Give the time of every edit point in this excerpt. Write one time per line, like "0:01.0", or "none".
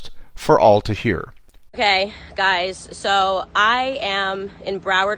0:01.7